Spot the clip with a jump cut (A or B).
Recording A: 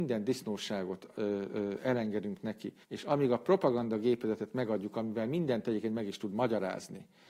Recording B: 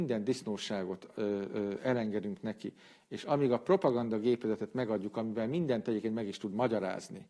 A